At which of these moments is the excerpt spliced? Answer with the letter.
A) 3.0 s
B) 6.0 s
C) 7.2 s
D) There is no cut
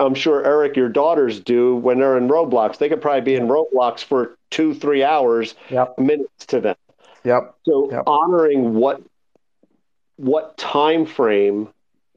B